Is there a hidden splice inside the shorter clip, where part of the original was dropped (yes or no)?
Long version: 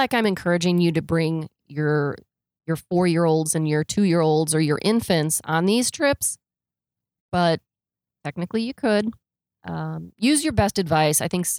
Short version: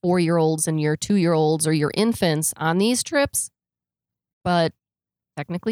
no